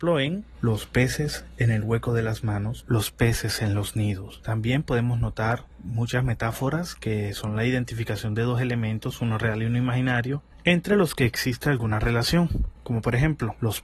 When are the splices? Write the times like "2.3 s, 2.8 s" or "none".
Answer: none

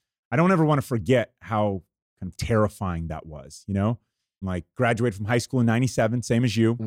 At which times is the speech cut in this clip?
4.4 s

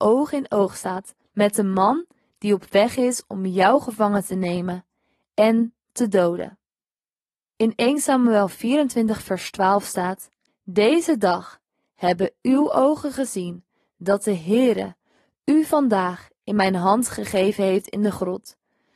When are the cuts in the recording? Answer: 10.5 s

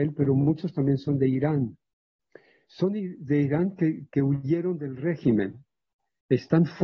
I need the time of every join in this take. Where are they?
none

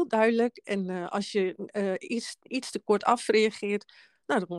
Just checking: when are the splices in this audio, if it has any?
none

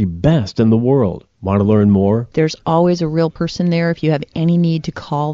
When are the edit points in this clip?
2.3 s

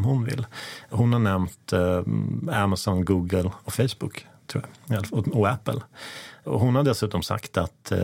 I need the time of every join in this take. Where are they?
none

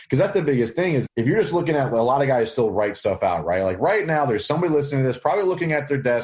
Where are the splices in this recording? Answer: 1.1 s

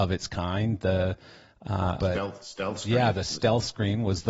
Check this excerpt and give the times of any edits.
2.0 s

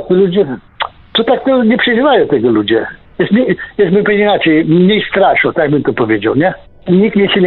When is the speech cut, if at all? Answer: none

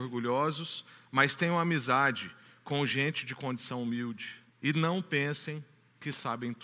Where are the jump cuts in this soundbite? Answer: 4.5 s

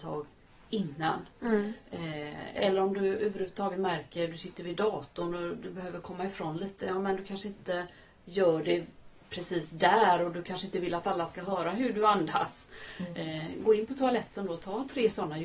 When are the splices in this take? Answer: none

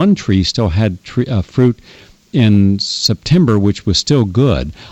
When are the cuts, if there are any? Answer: none

